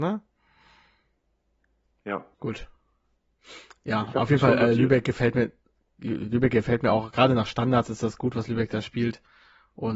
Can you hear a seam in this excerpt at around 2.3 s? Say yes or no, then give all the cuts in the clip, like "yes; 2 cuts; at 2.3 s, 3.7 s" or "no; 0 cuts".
yes; 1 cut; at 2.3 s